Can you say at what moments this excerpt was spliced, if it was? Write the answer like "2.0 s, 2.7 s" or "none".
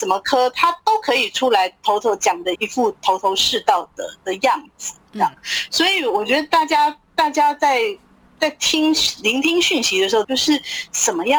2.6 s, 10.2 s